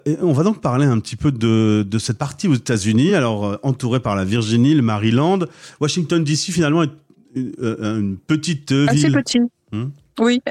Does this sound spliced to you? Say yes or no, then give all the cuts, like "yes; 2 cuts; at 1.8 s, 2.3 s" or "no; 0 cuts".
no; 0 cuts